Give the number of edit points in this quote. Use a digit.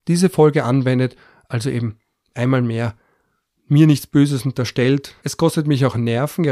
1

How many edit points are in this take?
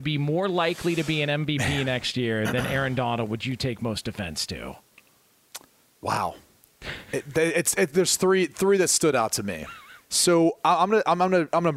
1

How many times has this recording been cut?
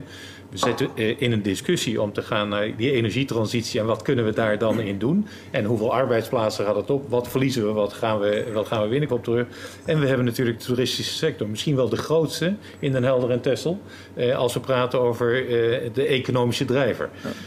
1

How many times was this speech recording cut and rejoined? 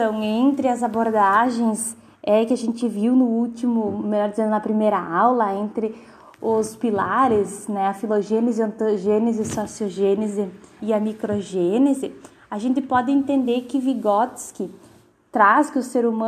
1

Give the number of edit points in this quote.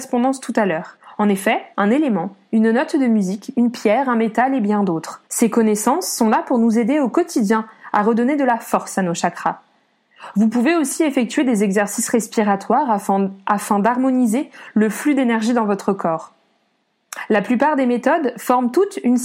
2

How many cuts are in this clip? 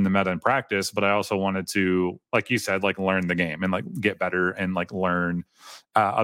0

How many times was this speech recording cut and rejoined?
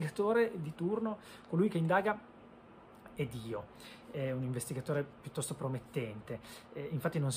0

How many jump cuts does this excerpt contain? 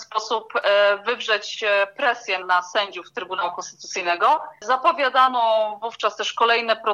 1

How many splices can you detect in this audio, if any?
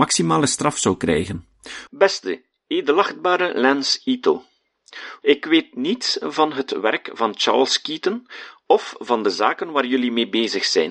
2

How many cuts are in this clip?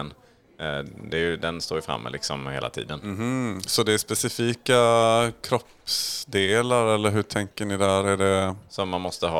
0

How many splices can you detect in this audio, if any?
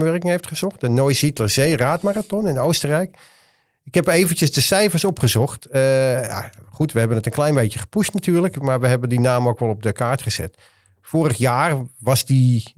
0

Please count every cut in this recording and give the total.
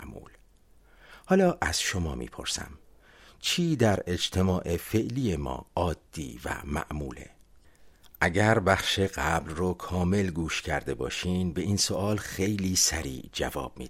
0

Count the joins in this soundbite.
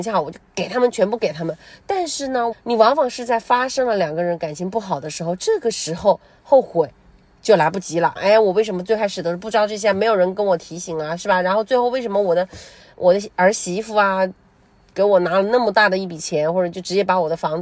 2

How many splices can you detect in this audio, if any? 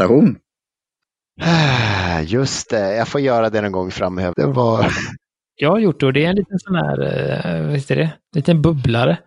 1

